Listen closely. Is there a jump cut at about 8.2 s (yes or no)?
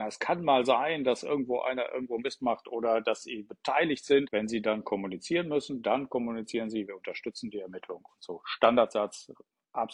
no